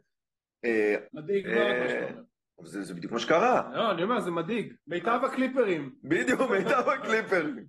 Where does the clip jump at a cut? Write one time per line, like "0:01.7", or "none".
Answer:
0:01.1
0:04.8